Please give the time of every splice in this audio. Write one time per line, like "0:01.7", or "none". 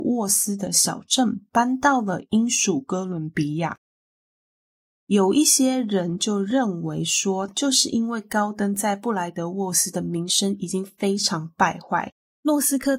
0:04.9
0:07.5